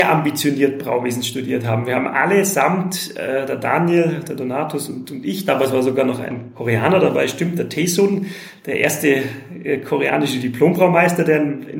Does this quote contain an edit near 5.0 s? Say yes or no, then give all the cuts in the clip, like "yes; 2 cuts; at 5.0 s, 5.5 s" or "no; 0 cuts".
no; 0 cuts